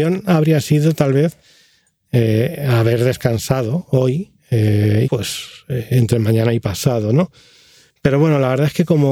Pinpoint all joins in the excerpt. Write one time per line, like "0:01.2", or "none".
0:05.0